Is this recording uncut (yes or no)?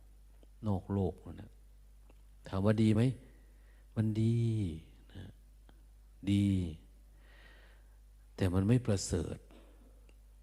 yes